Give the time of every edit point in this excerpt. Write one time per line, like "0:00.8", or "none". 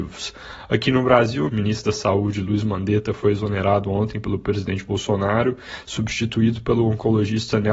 0:01.5